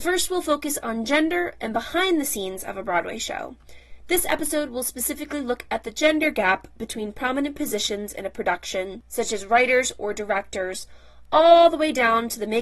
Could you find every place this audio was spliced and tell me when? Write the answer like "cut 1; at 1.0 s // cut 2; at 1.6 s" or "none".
none